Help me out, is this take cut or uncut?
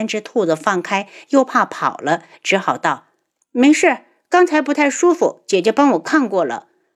cut